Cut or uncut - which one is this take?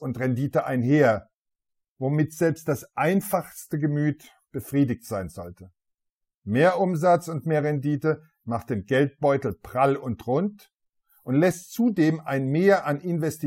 uncut